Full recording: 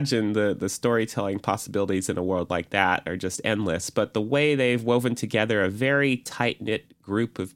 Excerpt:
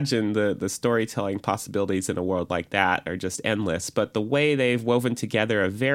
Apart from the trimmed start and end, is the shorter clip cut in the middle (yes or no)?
no